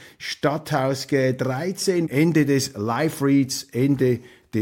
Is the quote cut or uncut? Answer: cut